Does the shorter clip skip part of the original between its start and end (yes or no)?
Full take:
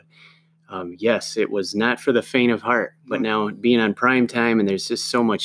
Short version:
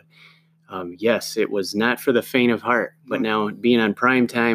no